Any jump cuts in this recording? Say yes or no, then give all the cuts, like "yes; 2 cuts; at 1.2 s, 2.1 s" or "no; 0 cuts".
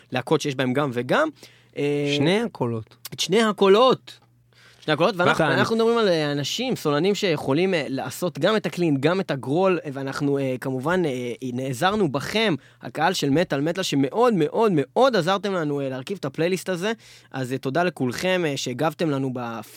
yes; 1 cut; at 5.4 s